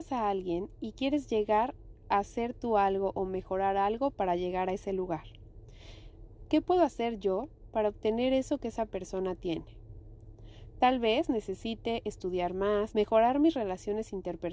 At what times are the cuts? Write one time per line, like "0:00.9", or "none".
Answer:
0:06.5
0:12.9